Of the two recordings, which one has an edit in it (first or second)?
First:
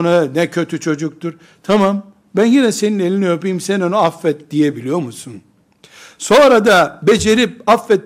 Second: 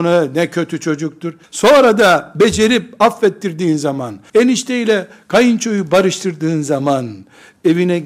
second